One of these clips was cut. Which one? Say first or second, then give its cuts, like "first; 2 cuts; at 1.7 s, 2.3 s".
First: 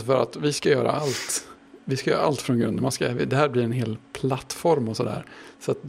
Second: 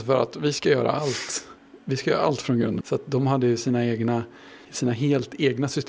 second; 2 cuts; at 2.8 s, 4.6 s